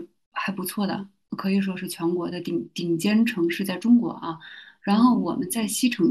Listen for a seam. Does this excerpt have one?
no; 0 cuts

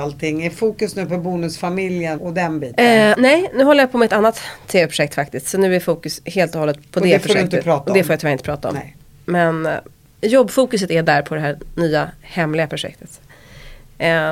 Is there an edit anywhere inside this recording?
yes; 1 cut; at 2.2 s

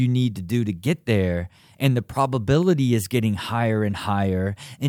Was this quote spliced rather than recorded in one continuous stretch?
no; 0 cuts

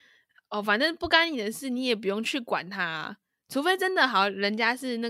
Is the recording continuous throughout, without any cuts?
yes; 0 cuts

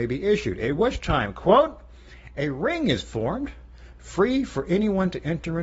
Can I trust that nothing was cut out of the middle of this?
yes; 0 cuts

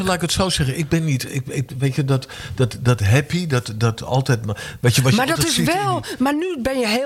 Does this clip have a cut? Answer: no; 0 cuts

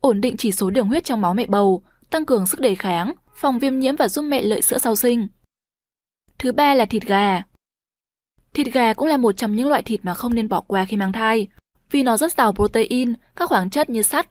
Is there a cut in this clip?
no; 0 cuts

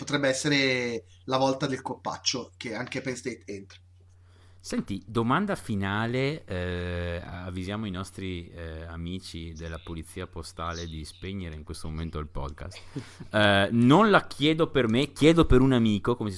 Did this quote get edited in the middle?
no; 0 cuts

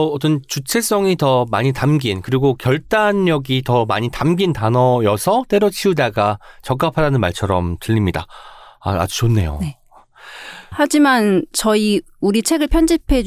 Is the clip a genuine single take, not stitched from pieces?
no; 1 cut; at 10.7 s

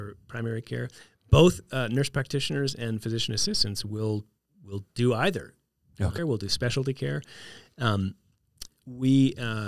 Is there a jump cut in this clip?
yes; 1 cut; at 6.2 s

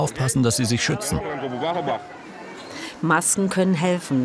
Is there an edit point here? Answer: no; 0 cuts

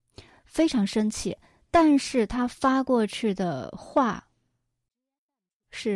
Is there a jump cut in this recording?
no; 0 cuts

